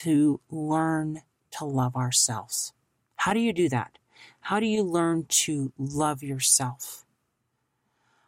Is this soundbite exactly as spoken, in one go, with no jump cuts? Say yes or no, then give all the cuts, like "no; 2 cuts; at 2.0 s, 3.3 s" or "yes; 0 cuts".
yes; 0 cuts